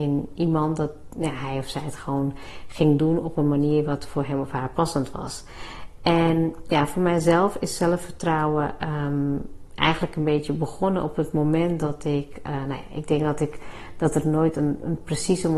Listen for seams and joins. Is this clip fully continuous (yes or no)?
yes